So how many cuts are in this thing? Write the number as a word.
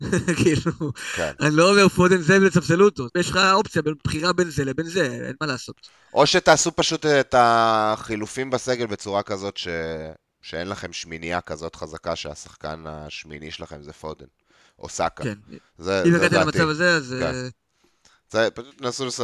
one